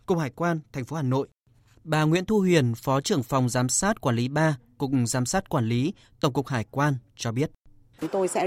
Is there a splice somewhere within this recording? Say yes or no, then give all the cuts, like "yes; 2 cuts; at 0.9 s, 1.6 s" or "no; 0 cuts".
no; 0 cuts